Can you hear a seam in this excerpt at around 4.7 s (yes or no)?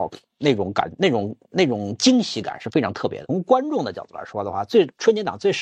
no